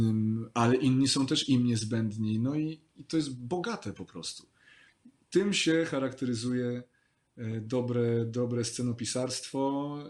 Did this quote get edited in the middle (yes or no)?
no